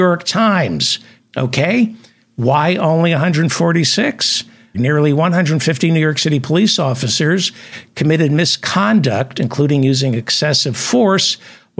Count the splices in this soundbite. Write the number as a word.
two